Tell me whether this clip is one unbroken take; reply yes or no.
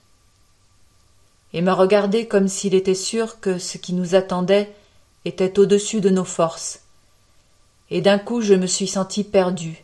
yes